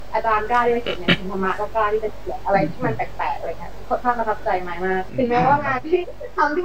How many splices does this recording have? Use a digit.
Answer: 0